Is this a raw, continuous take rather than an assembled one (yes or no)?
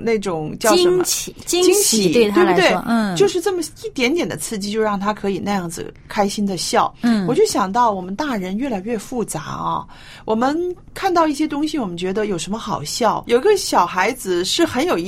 no